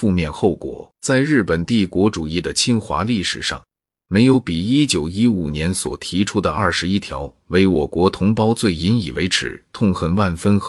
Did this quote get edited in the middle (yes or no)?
yes